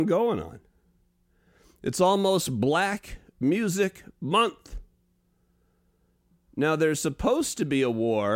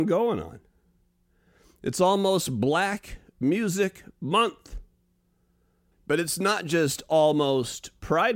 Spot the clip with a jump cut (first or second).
second